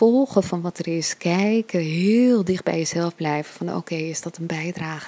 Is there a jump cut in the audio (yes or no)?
no